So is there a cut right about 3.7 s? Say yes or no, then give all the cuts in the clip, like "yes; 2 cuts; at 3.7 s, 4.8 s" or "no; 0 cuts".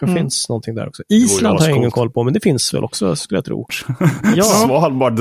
yes; 1 cut; at 3.7 s